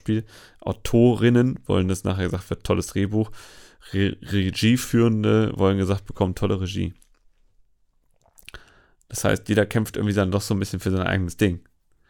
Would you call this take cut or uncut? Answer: uncut